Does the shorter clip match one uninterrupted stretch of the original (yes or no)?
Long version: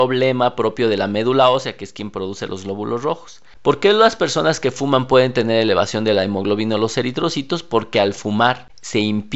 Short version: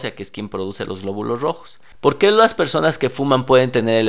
yes